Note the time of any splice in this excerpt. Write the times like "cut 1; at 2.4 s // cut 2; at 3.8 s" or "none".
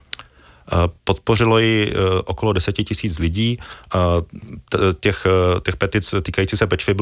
none